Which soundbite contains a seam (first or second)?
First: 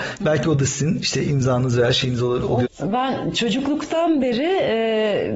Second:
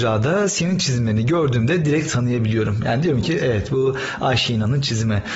first